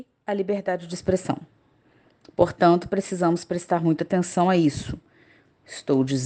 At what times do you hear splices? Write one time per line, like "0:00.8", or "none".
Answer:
none

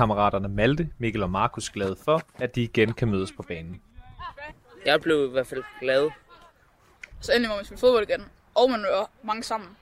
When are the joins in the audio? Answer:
0:07.1

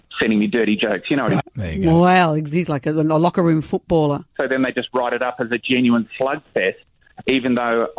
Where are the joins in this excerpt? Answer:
0:01.4
0:04.3

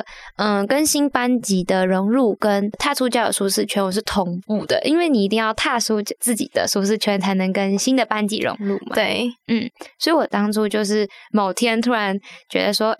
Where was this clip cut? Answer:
none

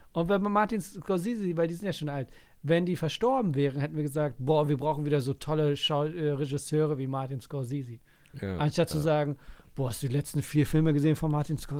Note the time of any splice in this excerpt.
none

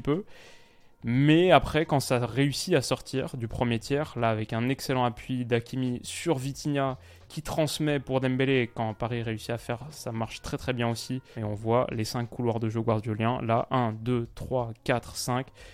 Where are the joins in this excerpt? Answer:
0:09.9
0:11.3

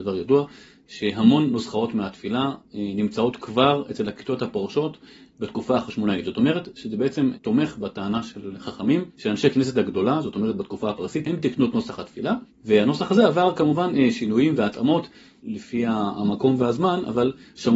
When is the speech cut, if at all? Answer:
0:11.2

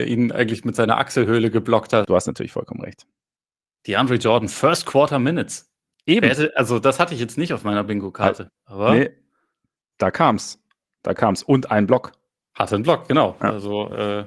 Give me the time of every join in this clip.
0:02.0

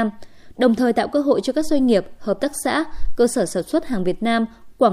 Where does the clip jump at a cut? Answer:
none

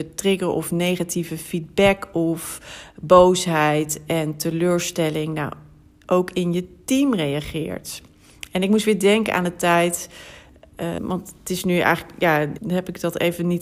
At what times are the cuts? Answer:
0:11.0
0:12.6

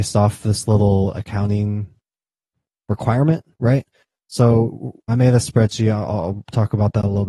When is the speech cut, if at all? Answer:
0:05.1

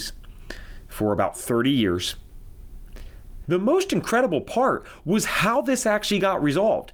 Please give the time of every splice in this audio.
0:03.4

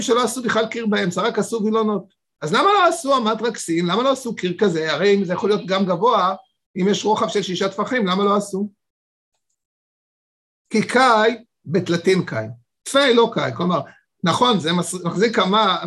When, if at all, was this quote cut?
none

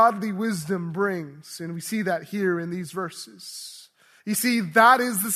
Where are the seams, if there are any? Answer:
0:04.2

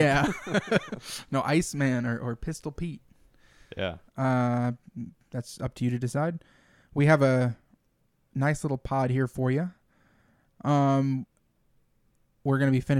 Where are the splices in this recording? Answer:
0:04.1

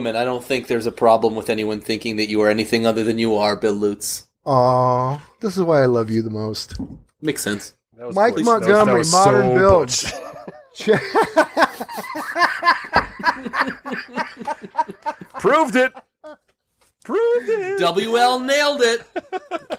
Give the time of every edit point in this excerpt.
0:04.3

